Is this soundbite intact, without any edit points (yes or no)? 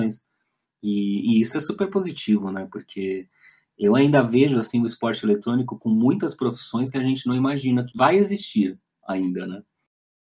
no